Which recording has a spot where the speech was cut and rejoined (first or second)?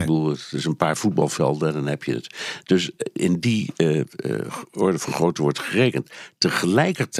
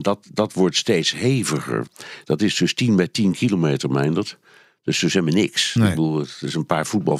second